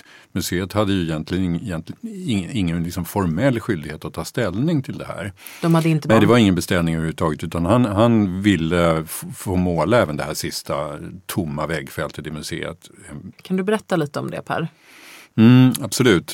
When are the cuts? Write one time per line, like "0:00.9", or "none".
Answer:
0:06.1
0:13.3